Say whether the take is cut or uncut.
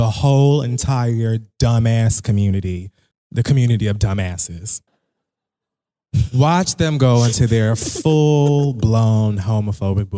cut